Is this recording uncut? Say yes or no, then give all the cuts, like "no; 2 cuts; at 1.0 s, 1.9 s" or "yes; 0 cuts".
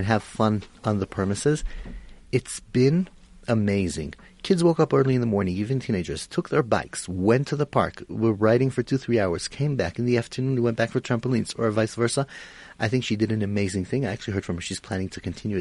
yes; 0 cuts